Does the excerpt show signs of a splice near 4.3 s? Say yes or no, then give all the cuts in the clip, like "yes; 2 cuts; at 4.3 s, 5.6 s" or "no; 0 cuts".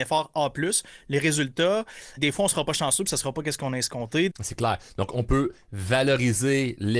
yes; 2 cuts; at 2.2 s, 4.3 s